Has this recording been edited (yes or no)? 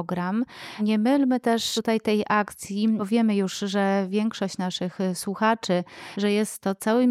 yes